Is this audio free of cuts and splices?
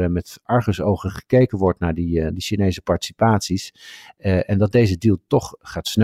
yes; 0 cuts

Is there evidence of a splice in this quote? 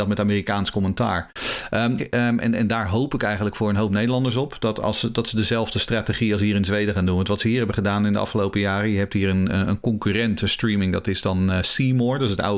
yes; 1 cut; at 2.0 s

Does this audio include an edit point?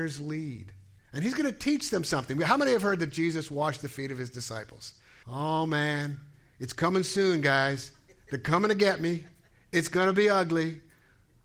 yes; 2 cuts; at 1.0 s, 5.2 s

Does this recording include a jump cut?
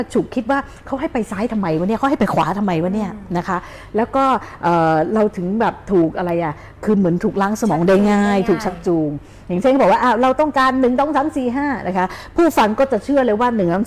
no; 0 cuts

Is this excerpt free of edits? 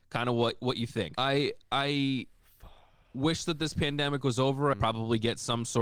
no; 2 cuts; at 1.1 s, 4.7 s

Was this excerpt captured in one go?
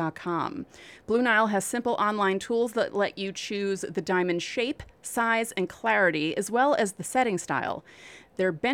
yes; 0 cuts

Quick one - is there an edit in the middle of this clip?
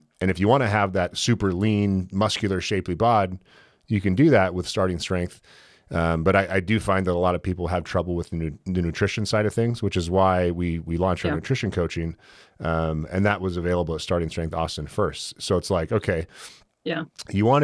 no; 0 cuts

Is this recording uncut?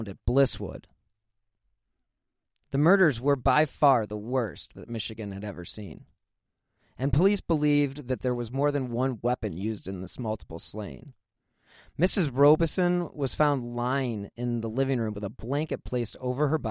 yes; 0 cuts

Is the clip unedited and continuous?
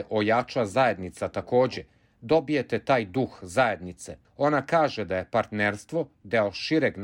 no; 1 cut; at 4.2 s

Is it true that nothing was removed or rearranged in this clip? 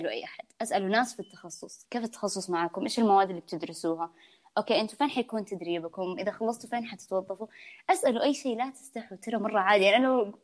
no; 1 cut; at 1.8 s

